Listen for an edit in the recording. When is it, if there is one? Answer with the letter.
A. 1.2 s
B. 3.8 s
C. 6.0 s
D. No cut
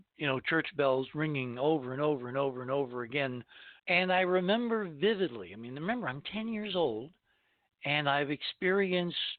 B